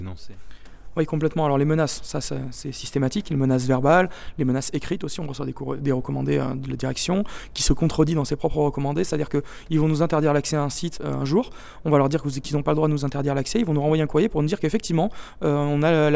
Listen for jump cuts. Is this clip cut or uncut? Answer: uncut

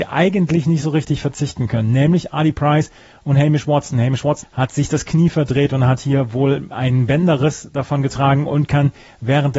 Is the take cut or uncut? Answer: cut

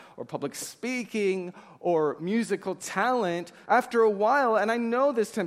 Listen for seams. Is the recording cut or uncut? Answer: cut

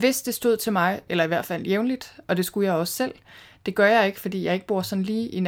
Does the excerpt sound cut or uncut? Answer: cut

